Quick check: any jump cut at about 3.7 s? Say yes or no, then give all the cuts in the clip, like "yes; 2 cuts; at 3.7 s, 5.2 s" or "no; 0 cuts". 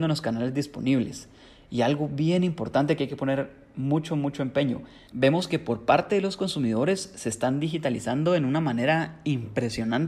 no; 1 cut; at 5.1 s